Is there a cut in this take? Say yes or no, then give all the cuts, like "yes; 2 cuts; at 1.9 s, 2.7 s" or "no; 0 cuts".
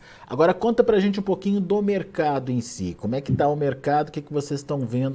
no; 0 cuts